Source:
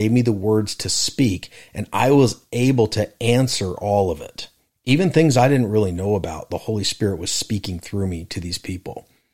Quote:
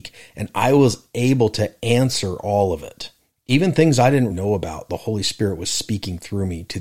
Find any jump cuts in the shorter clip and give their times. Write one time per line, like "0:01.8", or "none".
0:04.3